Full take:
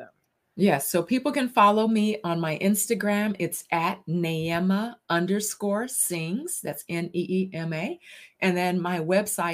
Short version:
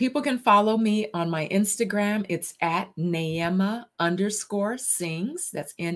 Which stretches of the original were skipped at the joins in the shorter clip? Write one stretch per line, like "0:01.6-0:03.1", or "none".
none